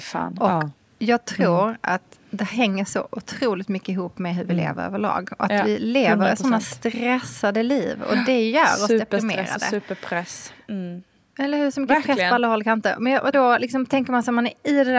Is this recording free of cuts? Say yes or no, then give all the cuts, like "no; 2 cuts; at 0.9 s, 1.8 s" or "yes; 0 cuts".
no; 1 cut; at 13.3 s